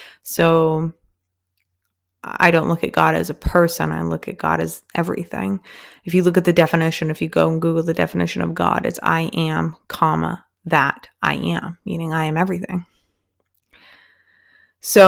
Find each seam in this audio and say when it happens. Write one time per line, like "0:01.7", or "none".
none